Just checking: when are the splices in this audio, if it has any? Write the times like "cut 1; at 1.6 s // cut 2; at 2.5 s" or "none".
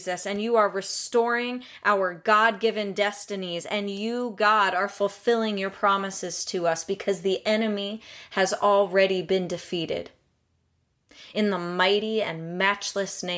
none